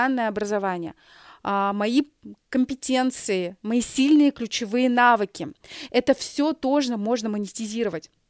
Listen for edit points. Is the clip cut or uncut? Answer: uncut